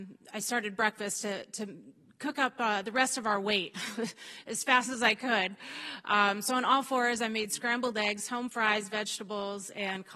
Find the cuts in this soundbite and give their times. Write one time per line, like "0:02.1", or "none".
none

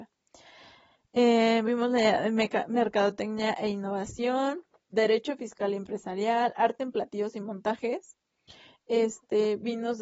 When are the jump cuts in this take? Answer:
0:04.9

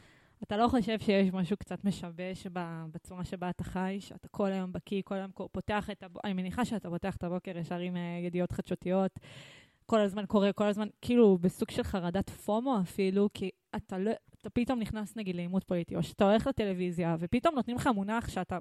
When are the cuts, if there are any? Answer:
none

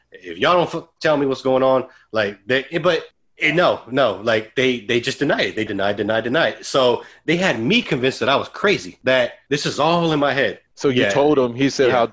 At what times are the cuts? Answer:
0:05.7
0:10.7

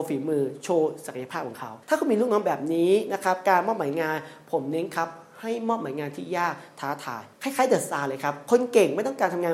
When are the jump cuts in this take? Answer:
0:01.8
0:07.3

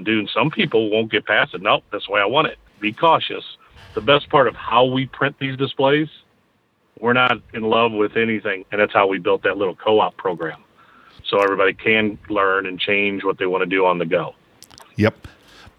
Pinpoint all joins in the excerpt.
0:08.6

